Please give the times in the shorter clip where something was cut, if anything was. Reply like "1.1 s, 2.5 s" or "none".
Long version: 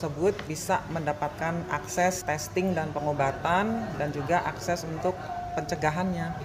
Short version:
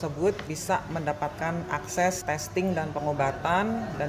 none

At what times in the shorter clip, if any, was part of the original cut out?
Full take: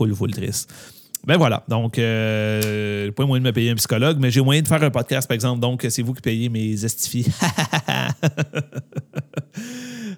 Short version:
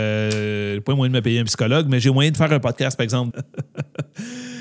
3.3 s

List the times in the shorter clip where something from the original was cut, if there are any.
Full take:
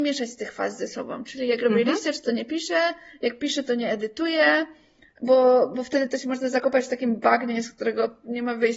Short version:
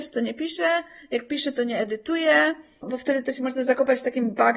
2.8 s

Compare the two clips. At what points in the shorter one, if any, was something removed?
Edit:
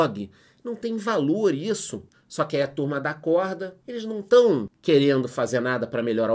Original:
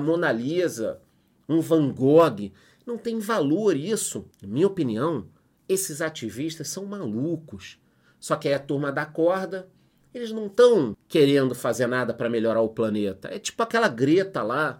2.1 s, 3.8 s

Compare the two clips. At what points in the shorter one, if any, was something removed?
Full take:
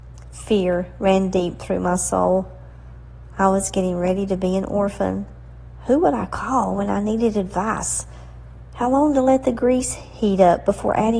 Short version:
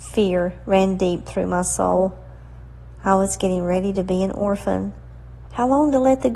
5.5 s

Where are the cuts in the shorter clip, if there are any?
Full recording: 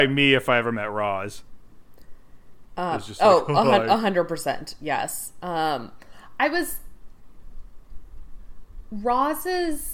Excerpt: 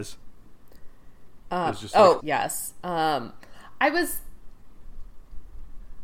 2.2 s

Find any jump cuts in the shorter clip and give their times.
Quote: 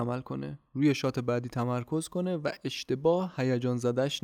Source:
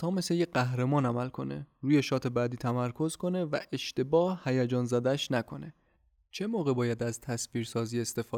none

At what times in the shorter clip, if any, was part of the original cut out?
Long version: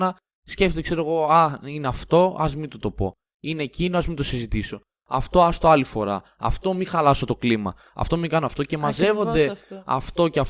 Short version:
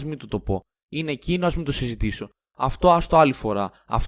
none

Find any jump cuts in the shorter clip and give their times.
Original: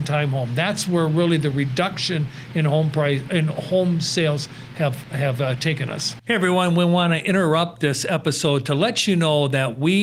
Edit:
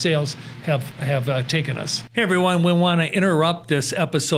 none

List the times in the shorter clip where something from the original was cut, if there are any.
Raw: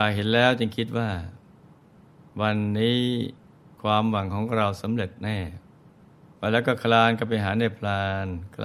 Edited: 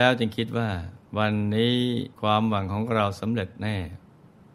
1.1 s, 2.1 s

